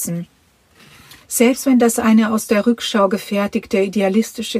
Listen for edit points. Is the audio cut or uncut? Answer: cut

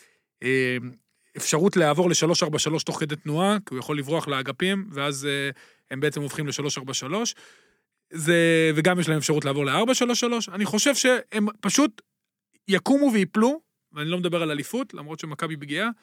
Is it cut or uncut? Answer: uncut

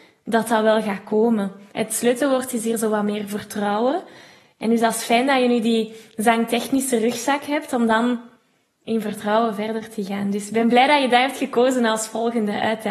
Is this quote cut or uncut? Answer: cut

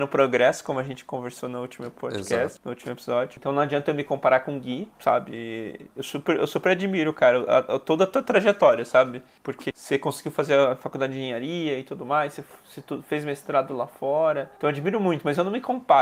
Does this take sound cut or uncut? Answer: uncut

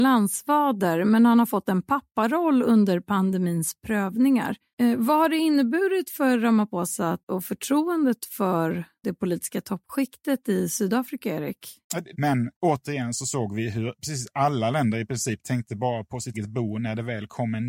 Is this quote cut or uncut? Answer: cut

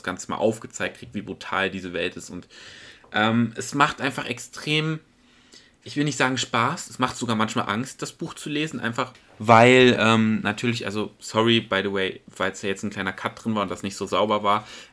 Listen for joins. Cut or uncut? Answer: uncut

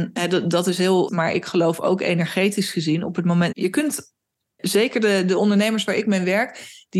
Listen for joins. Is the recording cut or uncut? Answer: cut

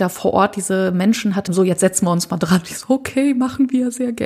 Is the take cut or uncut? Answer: cut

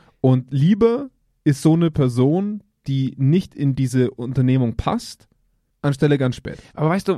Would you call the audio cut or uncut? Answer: cut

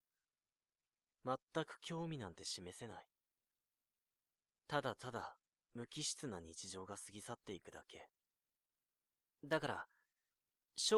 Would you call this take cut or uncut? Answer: uncut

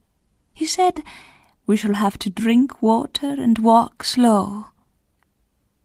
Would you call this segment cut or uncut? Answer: cut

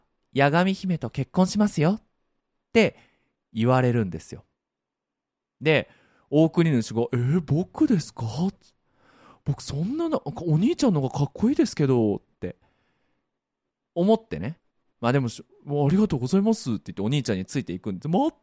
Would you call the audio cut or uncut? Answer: uncut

